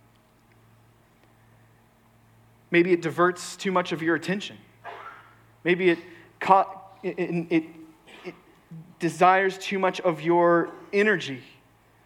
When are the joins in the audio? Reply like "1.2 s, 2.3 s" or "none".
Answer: none